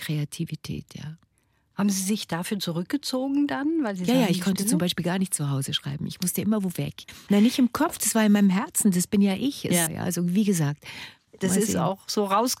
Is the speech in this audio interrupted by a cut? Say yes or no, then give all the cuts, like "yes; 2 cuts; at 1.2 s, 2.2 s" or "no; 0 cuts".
yes; 2 cuts; at 7.3 s, 9.9 s